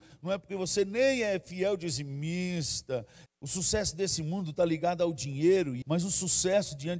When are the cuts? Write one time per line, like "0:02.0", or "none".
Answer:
0:03.3
0:05.8